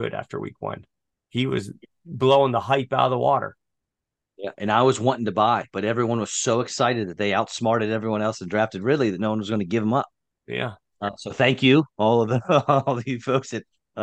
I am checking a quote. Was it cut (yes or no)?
no